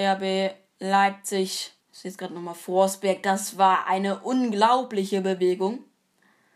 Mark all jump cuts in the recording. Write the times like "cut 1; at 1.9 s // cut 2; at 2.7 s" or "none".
cut 1; at 1.8 s